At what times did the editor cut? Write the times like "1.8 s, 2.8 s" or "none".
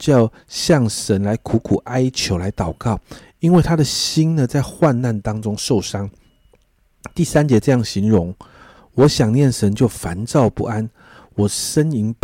none